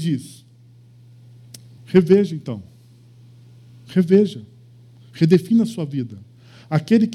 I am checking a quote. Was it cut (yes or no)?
yes